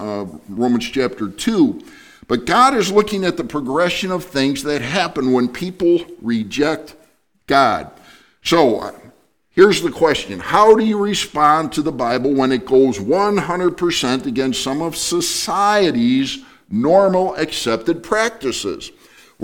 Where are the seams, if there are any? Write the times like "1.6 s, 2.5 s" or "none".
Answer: none